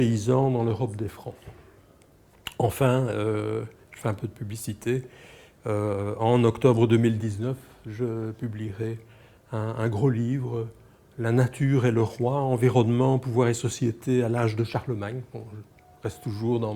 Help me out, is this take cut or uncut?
uncut